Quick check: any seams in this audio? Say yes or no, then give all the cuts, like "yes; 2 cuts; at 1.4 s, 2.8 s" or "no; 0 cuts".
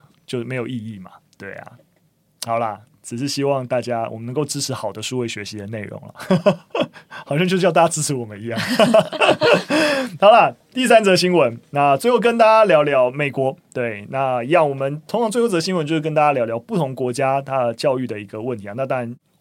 no; 0 cuts